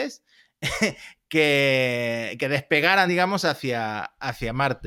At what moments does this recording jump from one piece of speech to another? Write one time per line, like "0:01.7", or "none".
none